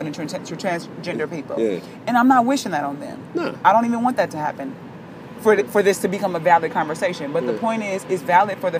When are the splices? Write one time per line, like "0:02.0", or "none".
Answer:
none